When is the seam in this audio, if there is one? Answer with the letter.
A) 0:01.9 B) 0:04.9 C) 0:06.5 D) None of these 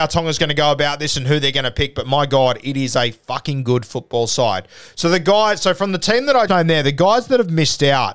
C